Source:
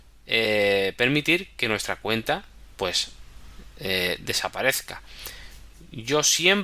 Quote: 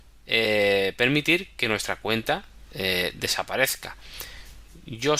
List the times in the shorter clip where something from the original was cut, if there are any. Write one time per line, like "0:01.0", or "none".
0:02.7